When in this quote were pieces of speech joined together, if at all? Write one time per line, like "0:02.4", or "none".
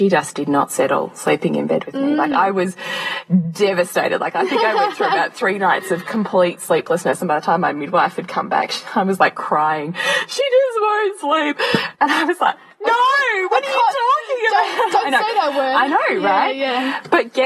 0:11.9

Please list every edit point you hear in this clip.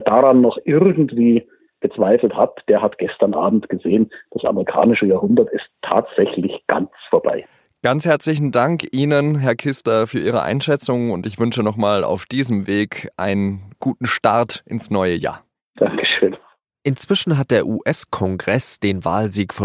none

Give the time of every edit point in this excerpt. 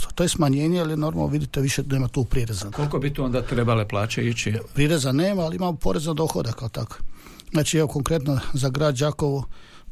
0:02.7
0:04.8

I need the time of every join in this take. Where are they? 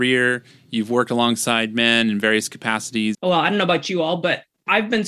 0:03.1

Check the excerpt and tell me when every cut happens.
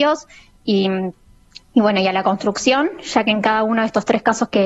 none

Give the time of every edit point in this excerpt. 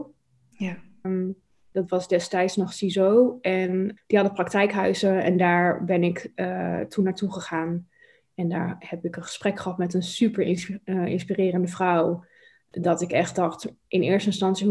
0:01.0
0:04.0

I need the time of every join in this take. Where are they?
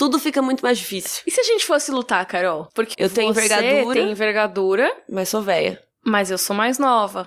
0:02.9

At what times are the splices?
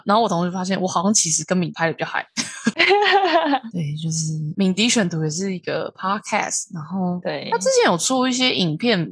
none

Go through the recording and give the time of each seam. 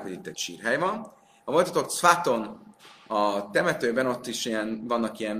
0:01.4

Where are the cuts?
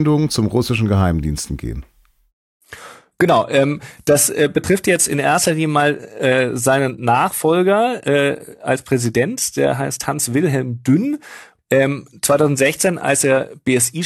0:11.6

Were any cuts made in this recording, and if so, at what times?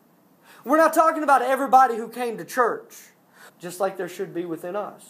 0:03.5

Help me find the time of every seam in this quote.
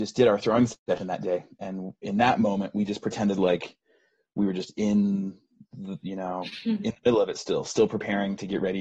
none

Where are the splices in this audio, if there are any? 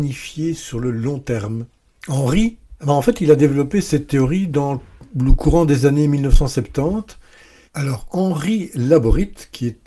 0:02.8
0:07.7

